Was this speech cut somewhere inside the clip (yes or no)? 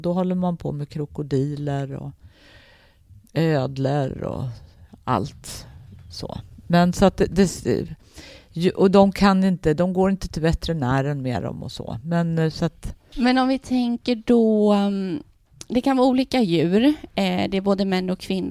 no